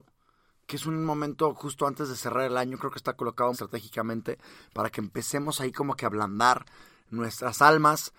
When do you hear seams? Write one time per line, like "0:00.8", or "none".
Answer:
0:03.5